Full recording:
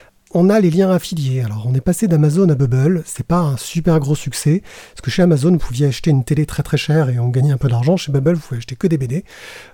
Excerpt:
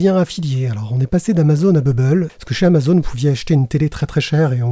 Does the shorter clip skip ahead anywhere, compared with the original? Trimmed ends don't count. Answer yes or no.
yes